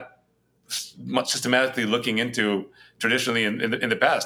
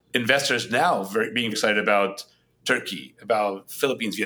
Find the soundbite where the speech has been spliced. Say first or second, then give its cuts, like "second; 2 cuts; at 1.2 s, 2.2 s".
second; 1 cut; at 1.5 s